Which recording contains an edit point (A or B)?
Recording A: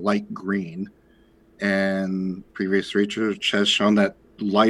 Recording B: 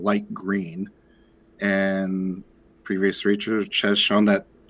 A